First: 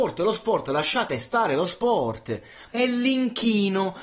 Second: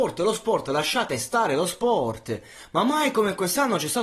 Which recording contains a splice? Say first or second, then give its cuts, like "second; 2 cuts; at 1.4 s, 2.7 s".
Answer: first; 1 cut; at 2.7 s